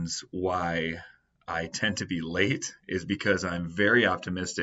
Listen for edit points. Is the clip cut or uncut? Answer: uncut